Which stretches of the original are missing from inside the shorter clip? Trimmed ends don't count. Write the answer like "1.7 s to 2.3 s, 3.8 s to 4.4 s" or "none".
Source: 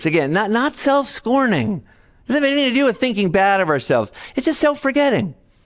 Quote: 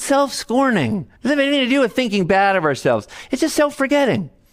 1.9 s to 2.2 s